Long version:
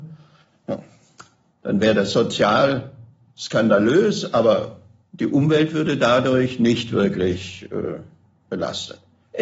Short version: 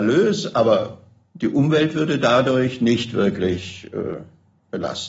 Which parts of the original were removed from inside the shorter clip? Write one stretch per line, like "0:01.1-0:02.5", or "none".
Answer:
none